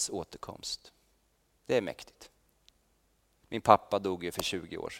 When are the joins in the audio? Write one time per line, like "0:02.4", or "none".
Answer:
0:01.6

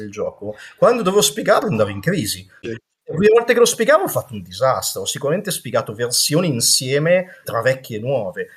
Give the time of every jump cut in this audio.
0:02.6
0:07.4

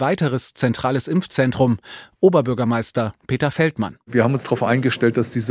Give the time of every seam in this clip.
none

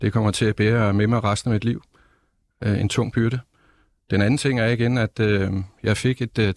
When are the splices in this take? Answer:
none

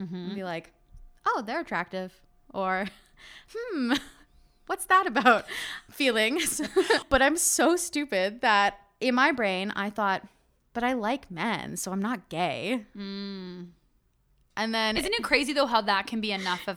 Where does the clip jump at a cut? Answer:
none

